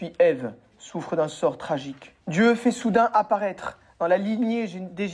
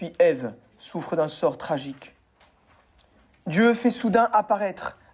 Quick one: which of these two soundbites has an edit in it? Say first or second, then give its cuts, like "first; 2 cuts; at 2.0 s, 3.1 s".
first; 1 cut; at 2.2 s